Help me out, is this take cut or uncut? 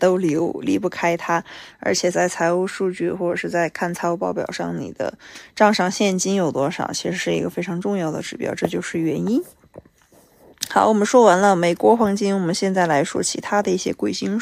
uncut